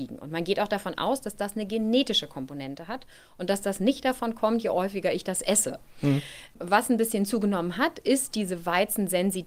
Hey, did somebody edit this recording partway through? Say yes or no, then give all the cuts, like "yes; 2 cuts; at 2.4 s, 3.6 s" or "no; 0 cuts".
no; 0 cuts